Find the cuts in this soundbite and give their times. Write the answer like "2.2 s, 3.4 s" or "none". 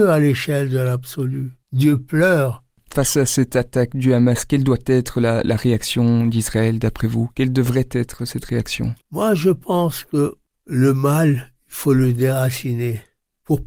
1.6 s, 9.0 s